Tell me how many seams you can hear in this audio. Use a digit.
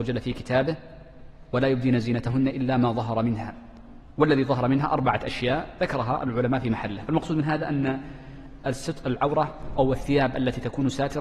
1